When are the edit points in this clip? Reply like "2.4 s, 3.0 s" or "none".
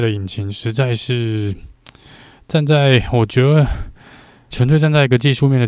4.5 s

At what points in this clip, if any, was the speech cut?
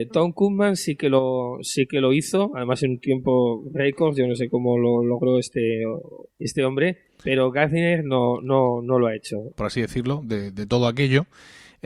6.3 s, 9.5 s

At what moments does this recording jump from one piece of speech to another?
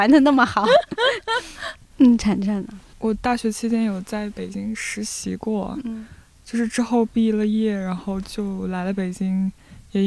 none

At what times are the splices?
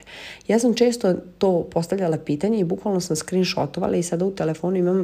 none

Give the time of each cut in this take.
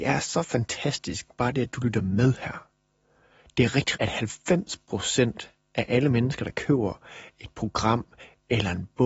3.9 s

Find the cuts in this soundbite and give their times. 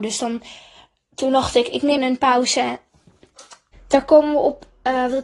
2.0 s, 3.7 s

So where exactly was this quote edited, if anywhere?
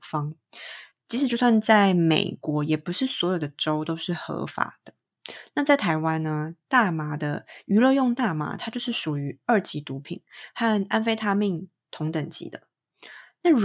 none

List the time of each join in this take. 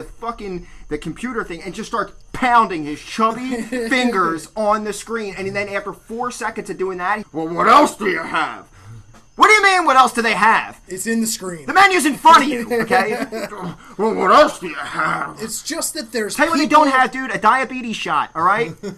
7.2 s, 13.5 s

